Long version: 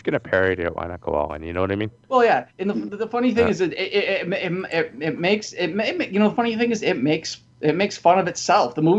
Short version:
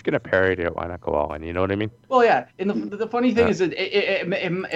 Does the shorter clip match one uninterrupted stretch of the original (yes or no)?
yes